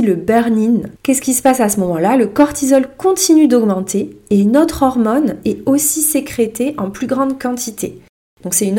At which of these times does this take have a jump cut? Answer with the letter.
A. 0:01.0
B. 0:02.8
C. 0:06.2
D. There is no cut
A